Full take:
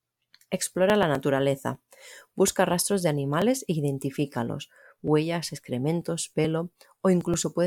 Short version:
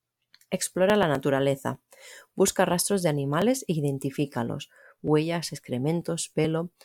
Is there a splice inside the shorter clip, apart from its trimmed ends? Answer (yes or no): no